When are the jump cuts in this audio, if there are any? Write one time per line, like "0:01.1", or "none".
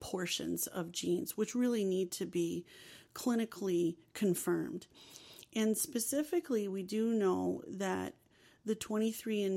none